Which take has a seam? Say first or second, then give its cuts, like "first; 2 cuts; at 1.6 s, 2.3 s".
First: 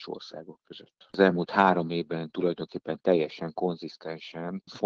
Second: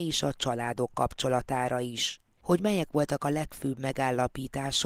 first; 1 cut; at 1.1 s